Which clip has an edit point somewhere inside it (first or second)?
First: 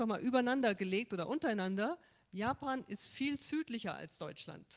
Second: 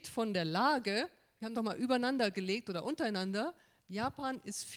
second